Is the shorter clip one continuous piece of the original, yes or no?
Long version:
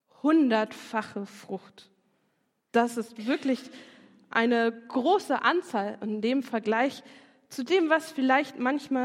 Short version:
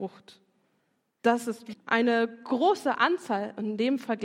no